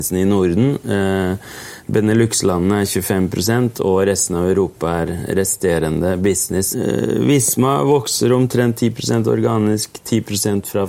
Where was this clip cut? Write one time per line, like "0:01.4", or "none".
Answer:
none